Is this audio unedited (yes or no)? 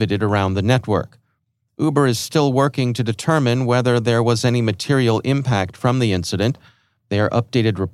yes